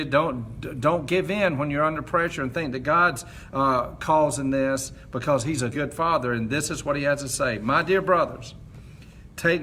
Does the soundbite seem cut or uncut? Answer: cut